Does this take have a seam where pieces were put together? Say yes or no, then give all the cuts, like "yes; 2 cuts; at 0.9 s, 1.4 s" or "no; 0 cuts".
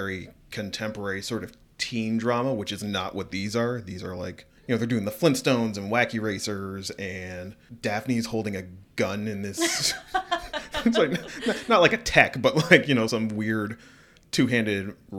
no; 0 cuts